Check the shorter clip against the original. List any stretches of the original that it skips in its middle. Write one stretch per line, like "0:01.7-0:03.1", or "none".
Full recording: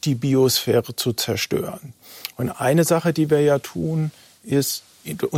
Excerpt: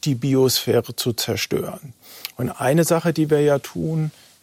none